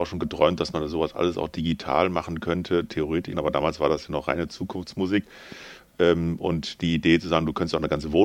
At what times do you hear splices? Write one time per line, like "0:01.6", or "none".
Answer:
0:03.3